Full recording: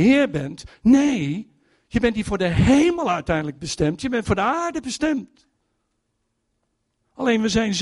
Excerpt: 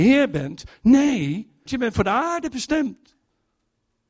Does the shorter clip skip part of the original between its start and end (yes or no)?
yes